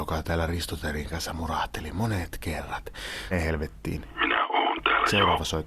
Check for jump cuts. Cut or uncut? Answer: cut